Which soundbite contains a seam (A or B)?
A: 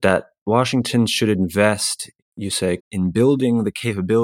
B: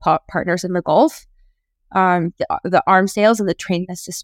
A